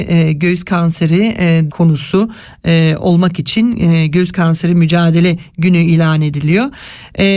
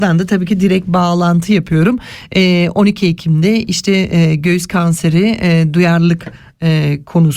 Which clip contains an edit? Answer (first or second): first